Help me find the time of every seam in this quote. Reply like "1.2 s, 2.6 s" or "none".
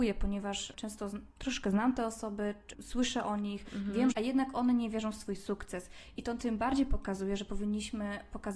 4.1 s